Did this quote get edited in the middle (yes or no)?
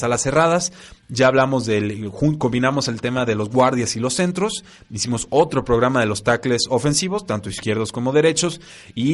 no